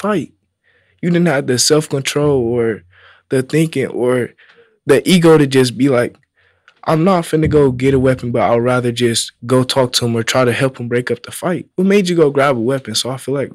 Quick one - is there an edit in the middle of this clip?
yes; 1 cut; at 11.7 s

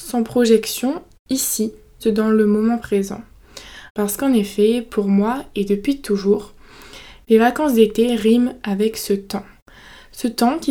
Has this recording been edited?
yes; 2 cuts; at 2.0 s, 3.9 s

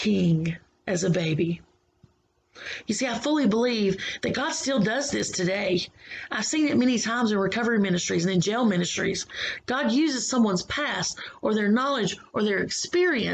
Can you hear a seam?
no; 0 cuts

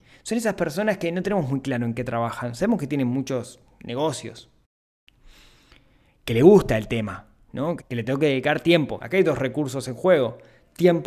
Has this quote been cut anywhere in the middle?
yes; 2 cuts; at 7.8 s, 9.0 s

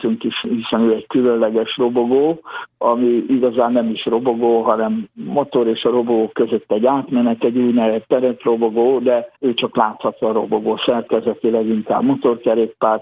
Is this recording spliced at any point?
yes; 1 cut; at 9.3 s

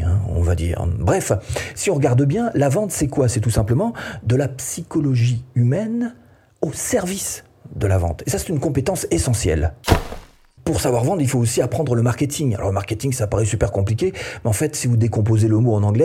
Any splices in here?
no; 0 cuts

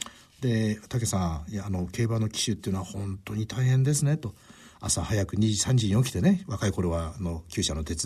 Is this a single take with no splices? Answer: yes; 0 cuts

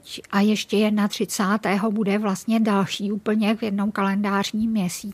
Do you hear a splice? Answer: no; 0 cuts

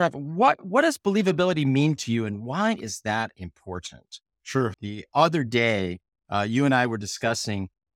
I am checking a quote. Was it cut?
yes; 1 cut; at 4.7 s

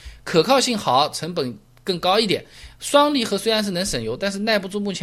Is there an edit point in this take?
no; 0 cuts

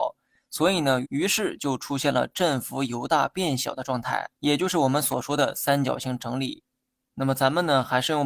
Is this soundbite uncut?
no; 2 cuts; at 1.0 s, 4.3 s

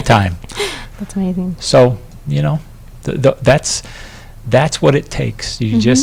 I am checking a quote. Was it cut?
yes; 1 cut; at 0.9 s

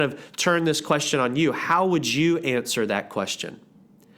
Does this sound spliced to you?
no; 0 cuts

